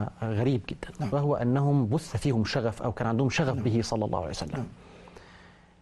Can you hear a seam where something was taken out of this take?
no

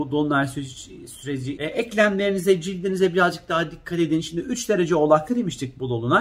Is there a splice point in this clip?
yes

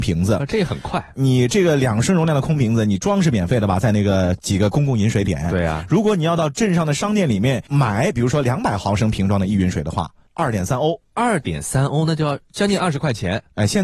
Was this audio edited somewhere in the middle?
no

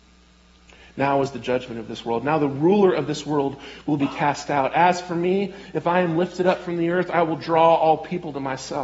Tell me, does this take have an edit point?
no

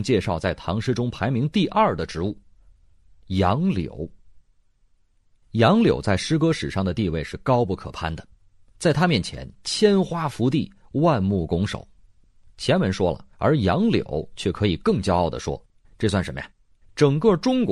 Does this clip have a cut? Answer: yes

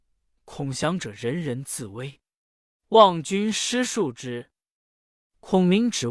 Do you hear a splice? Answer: no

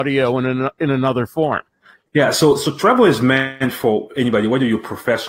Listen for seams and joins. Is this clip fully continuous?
yes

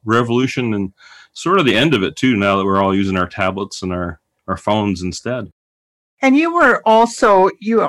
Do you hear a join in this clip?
no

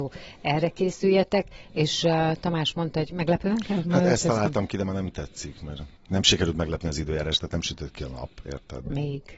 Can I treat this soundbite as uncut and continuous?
no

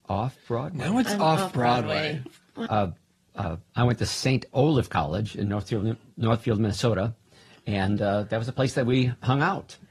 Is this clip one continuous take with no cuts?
no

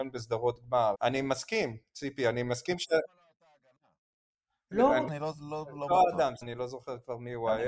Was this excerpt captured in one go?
no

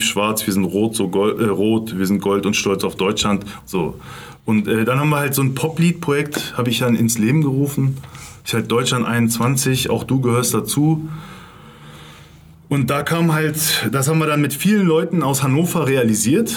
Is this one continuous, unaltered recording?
no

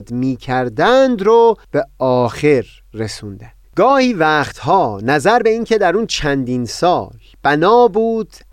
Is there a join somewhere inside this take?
yes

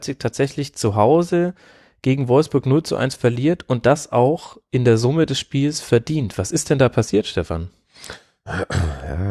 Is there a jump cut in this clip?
no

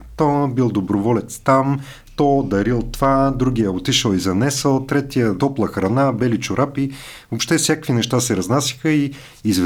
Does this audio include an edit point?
yes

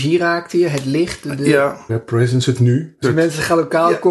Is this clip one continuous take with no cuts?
no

